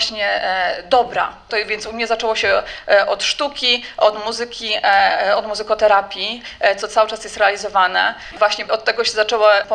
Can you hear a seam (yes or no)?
yes